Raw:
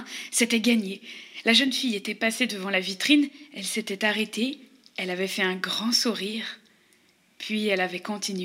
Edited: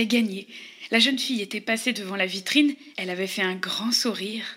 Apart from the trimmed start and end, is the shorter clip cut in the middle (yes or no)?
yes